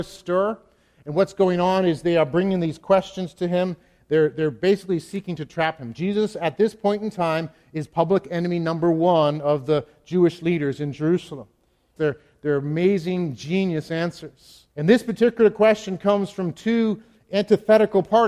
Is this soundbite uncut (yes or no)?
no